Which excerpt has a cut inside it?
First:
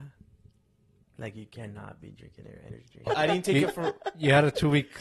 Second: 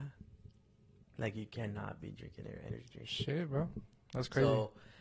first; 1 cut; at 3.1 s

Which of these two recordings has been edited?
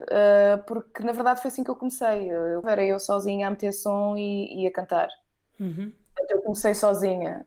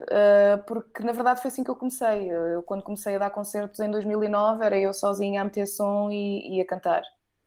first; 1 cut; at 2.6 s

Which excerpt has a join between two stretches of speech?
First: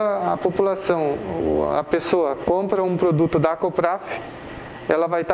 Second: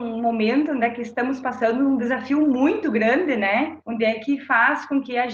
second; 1 cut; at 3.8 s

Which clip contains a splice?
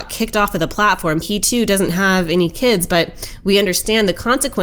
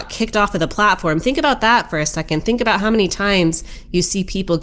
first; 1 cut; at 1.2 s

